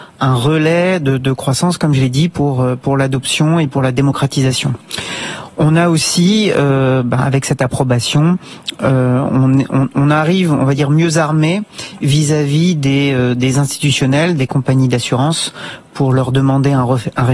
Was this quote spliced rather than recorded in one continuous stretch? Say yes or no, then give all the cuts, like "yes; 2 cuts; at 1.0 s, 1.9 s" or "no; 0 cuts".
no; 0 cuts